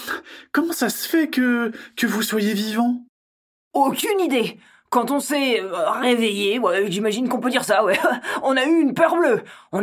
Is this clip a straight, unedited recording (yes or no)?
yes